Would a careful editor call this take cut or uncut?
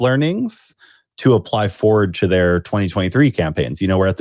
uncut